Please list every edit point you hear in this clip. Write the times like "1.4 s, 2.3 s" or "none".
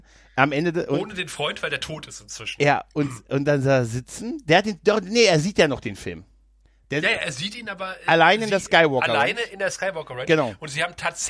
none